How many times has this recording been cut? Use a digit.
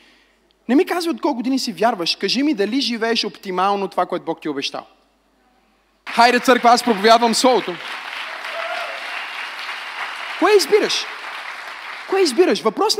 1